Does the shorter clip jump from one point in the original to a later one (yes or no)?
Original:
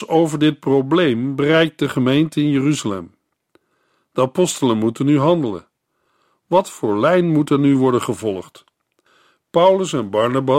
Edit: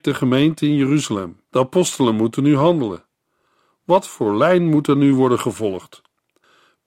yes